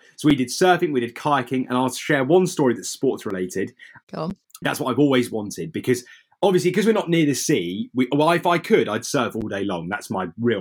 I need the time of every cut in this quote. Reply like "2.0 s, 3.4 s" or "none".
4.6 s